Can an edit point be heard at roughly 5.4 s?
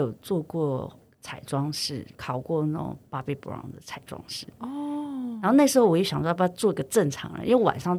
no; 0 cuts

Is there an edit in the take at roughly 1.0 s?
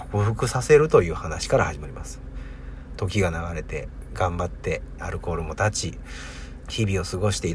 no; 3 cuts; at 2.9 s, 5.0 s, 6.6 s

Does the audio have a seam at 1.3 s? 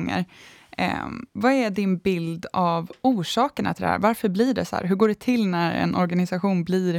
yes; 1 cut; at 1.3 s

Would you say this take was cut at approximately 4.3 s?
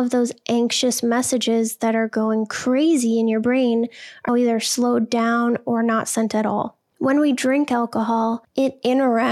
yes; 2 cuts; at 4.3 s, 6.8 s

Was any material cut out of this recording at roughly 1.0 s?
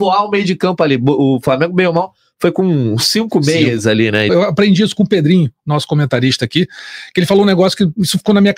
no; 1 cut; at 4.3 s

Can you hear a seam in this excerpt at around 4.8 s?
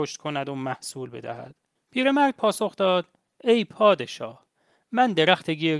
no; 1 cut; at 1.8 s

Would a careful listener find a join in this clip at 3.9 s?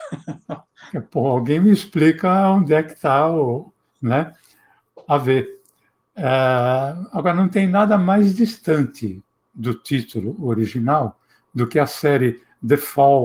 no; 0 cuts

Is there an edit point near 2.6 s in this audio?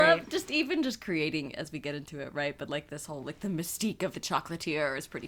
no; 1 cut; at 4.1 s

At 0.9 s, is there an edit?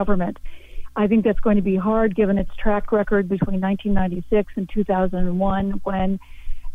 no; 0 cuts

